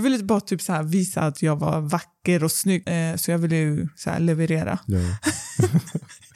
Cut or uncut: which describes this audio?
cut